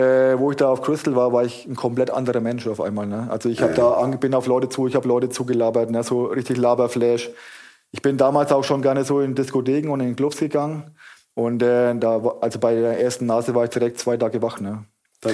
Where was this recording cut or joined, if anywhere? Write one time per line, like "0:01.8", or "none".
none